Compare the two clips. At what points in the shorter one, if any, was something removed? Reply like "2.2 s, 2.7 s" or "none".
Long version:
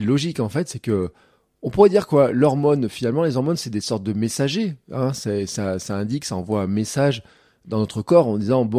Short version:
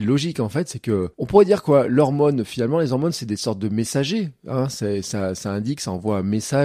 1.1 s